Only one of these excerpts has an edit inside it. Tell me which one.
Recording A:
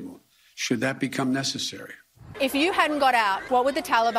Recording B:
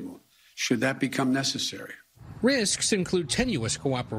A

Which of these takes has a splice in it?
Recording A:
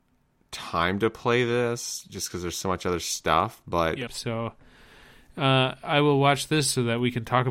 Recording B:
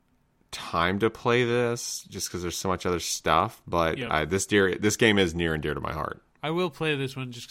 A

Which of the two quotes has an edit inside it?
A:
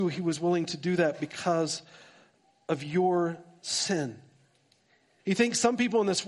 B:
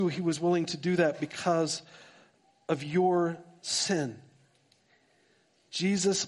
A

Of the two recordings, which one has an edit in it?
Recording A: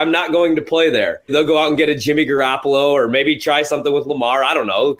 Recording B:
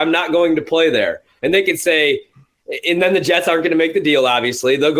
A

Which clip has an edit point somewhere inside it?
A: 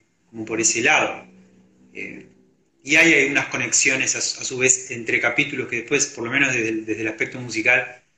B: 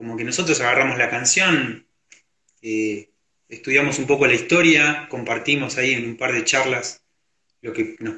A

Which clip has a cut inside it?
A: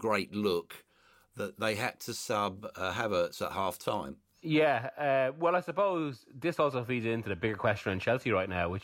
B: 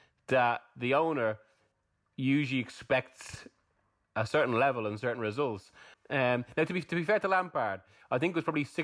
B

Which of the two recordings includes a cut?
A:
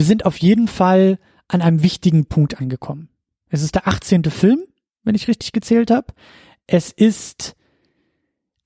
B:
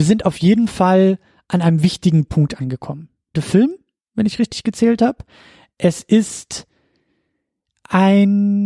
B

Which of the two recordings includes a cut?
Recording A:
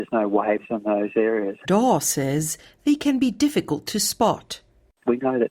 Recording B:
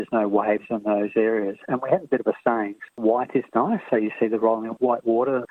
A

